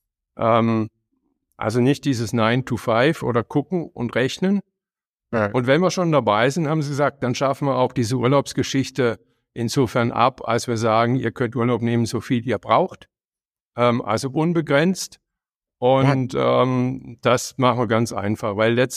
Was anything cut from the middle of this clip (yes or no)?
no